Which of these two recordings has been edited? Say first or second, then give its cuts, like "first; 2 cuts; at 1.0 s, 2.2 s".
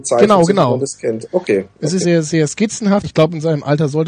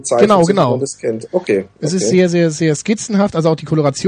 first; 2 cuts; at 2.0 s, 3.0 s